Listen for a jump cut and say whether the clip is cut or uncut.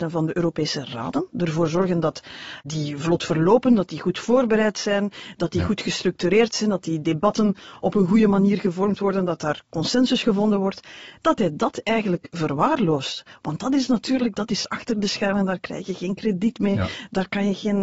uncut